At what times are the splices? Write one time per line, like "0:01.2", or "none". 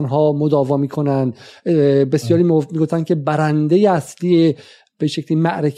none